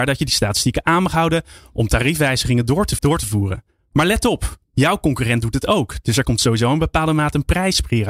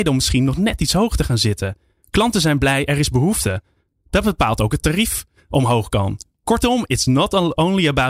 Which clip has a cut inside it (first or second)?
first